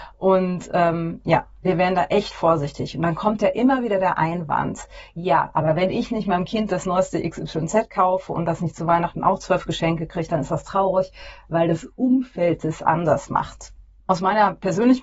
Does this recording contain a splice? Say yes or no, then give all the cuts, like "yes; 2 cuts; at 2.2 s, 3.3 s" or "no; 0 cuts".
no; 0 cuts